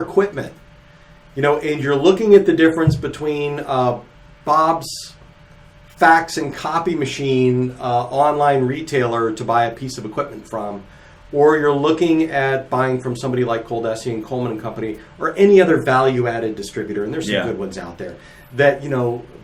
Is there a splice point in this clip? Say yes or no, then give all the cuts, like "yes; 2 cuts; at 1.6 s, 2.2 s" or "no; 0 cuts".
no; 0 cuts